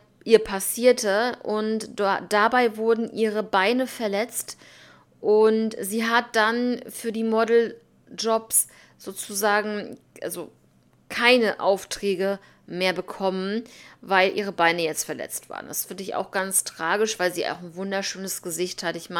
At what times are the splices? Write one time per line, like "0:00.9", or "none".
none